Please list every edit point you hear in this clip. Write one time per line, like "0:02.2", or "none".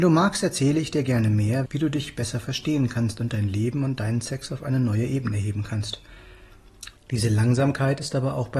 0:01.7
0:07.0